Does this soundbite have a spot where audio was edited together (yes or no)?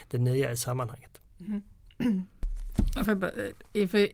yes